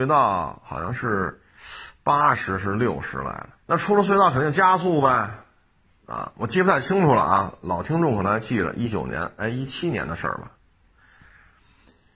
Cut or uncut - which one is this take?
cut